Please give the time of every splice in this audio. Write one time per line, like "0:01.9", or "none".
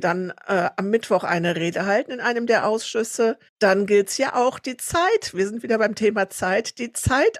0:03.5